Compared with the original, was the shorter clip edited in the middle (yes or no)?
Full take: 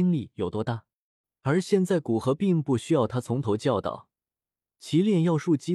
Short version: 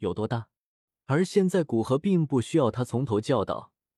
no